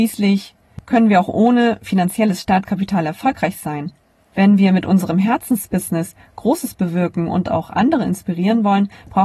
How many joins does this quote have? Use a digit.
1